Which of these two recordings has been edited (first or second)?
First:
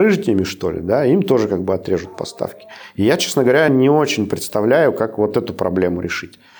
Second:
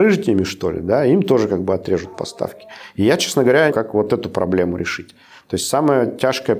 second